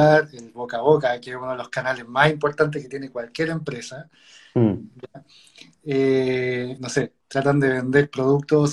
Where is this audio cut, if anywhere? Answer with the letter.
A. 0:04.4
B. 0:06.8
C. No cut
B